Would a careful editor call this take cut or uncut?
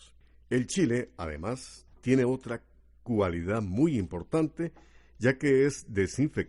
uncut